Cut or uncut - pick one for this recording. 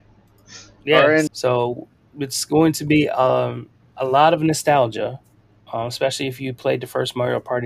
cut